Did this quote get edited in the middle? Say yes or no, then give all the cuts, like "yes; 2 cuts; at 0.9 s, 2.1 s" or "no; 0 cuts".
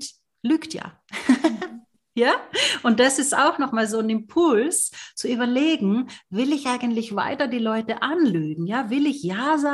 no; 0 cuts